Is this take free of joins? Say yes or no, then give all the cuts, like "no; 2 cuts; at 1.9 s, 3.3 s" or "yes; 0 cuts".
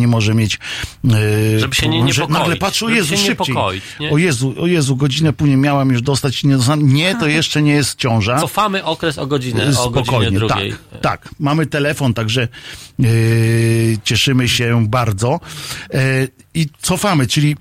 yes; 0 cuts